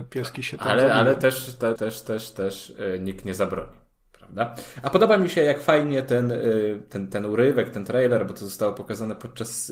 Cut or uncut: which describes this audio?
cut